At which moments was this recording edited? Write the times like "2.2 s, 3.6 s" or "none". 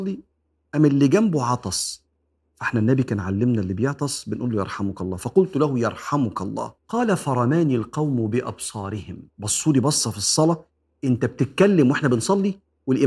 6.8 s, 9.3 s